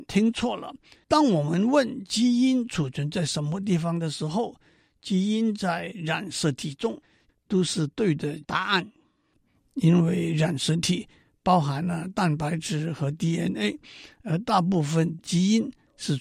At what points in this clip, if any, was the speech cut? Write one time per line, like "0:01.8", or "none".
0:01.0
0:07.3